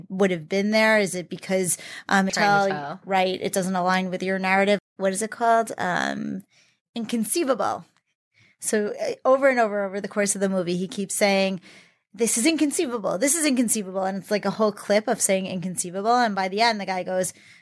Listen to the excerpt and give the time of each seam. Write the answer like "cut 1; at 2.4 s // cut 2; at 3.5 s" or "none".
cut 1; at 2.3 s // cut 2; at 4.8 s